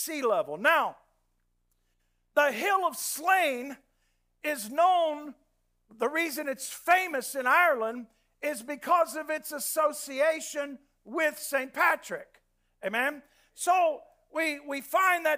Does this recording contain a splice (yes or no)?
no